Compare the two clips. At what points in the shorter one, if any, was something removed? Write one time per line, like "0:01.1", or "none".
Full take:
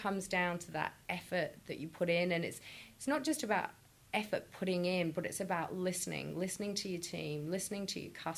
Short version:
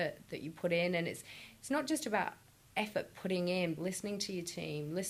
0:03.8